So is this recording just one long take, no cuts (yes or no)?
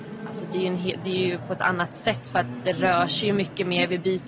yes